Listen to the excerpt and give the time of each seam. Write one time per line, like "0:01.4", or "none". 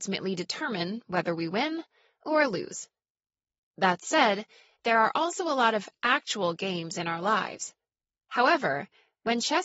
0:08.2